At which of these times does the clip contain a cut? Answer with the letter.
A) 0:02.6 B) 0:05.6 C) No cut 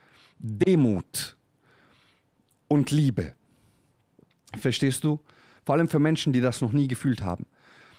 B